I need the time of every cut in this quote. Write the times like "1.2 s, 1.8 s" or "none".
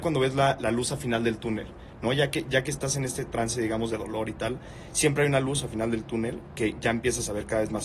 none